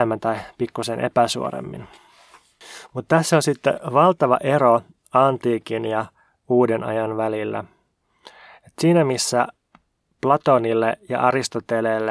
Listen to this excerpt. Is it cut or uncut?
uncut